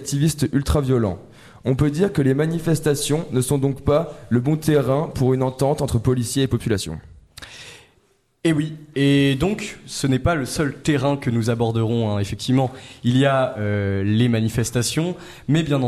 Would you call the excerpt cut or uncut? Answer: uncut